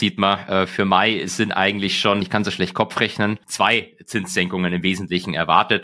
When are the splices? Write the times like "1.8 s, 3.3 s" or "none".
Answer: 2.2 s, 3.4 s